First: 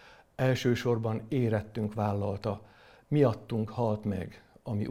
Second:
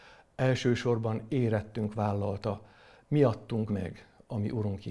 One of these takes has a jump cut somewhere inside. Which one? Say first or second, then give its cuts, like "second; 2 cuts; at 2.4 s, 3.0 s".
second; 1 cut; at 3.7 s